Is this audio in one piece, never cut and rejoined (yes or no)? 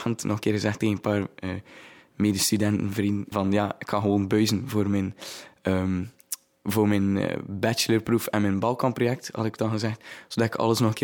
no